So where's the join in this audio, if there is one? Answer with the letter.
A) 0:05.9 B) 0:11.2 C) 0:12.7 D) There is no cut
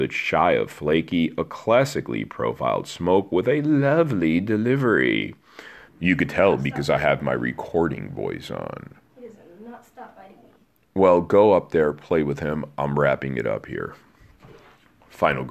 A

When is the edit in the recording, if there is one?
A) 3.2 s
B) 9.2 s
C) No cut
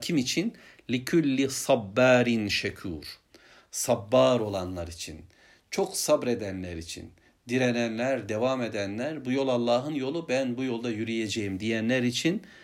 C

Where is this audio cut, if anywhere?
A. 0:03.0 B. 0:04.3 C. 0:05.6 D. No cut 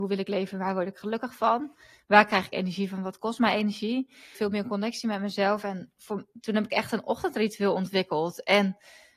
B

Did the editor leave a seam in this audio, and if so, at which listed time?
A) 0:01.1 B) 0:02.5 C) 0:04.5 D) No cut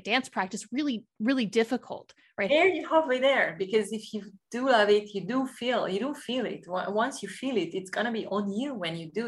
B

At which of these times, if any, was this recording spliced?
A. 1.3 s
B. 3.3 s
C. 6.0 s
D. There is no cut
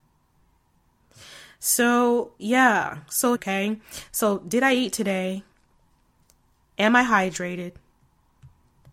B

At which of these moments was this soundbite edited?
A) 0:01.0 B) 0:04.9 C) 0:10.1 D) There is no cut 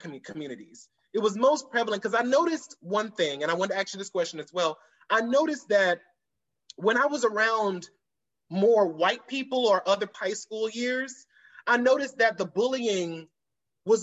C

